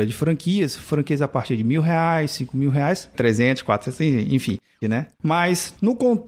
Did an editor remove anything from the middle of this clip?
yes; 2 cuts; at 3.1 s, 4.8 s

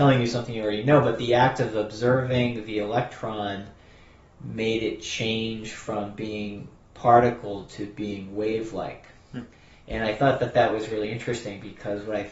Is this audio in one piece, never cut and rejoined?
yes; 0 cuts

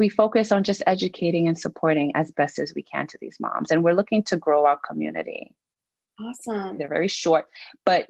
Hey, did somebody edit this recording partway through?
yes; 1 cut; at 6.8 s

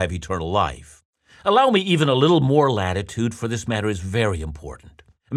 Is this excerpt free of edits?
yes; 0 cuts

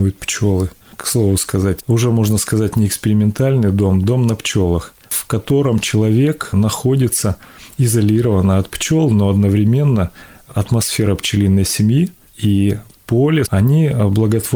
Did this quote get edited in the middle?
yes; 2 cuts; at 1.8 s, 13.5 s

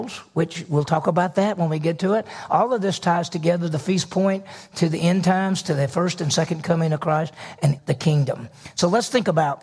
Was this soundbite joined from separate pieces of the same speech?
yes; 1 cut; at 7.8 s

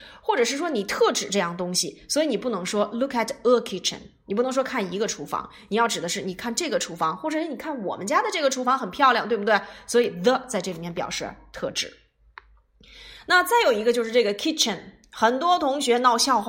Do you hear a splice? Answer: no; 0 cuts

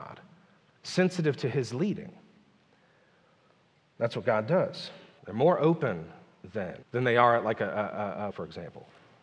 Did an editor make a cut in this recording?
yes; 3 cuts; at 5.2 s, 6.8 s, 8.3 s

